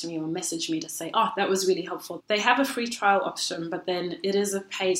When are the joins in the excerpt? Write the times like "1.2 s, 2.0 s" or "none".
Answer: 2.2 s